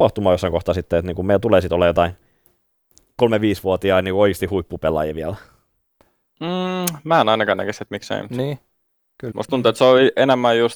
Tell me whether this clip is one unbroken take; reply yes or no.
no